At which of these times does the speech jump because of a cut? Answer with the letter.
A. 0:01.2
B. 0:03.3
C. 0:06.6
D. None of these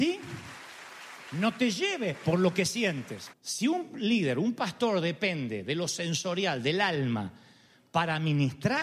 B